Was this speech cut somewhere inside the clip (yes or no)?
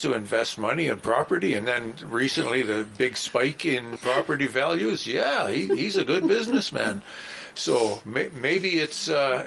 yes